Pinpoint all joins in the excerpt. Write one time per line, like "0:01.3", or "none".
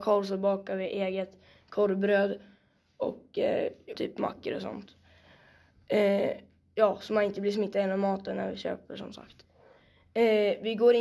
0:03.9